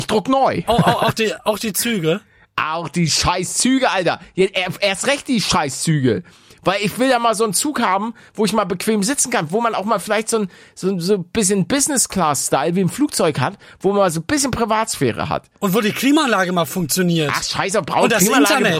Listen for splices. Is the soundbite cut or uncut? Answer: uncut